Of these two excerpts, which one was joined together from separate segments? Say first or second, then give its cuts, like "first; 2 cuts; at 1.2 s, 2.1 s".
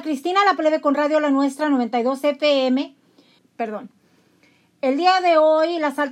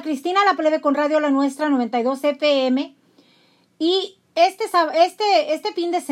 first; 1 cut; at 3.4 s